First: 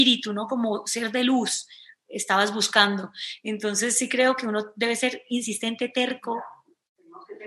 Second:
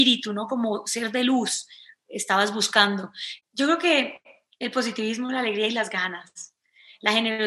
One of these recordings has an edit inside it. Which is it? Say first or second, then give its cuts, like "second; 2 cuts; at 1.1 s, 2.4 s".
second; 1 cut; at 3.4 s